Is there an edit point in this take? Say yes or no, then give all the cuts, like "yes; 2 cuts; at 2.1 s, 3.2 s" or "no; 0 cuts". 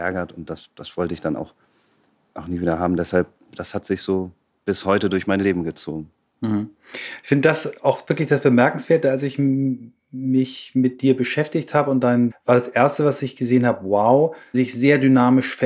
yes; 2 cuts; at 12.3 s, 14.5 s